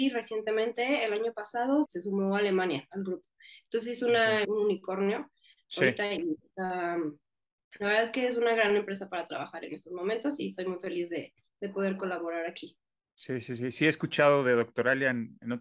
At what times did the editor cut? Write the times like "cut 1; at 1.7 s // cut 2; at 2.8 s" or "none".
cut 1; at 1.8 s // cut 2; at 4.4 s